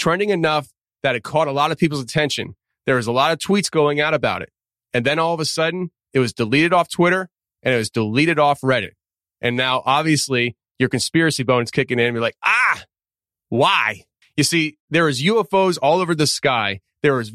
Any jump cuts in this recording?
yes; 1 cut; at 14.2 s

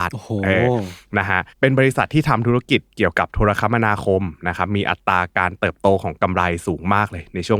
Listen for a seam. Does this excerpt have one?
yes; 1 cut; at 1.5 s

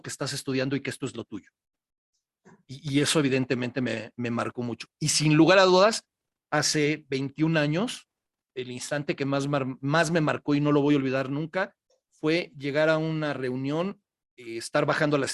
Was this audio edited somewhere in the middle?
no; 0 cuts

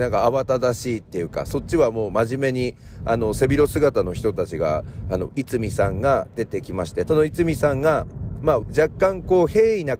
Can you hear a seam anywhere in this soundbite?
yes; 3 cuts; at 5.3 s, 7.1 s, 8.6 s

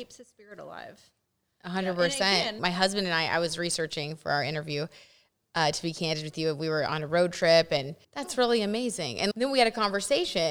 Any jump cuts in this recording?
yes; 3 cuts; at 2.6 s, 8.0 s, 9.3 s

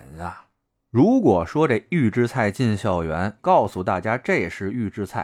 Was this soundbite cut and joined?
yes; 1 cut; at 3.4 s

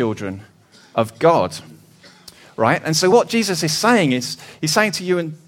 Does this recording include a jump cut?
no; 0 cuts

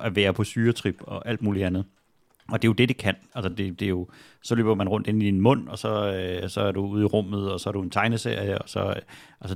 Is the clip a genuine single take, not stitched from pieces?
yes; 0 cuts

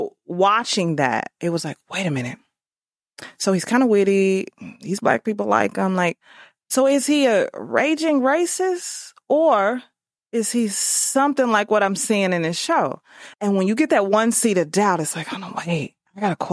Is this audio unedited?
no; 1 cut; at 13.3 s

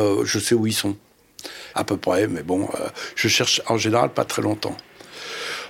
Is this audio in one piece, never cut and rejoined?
no; 2 cuts; at 1.7 s, 4.3 s

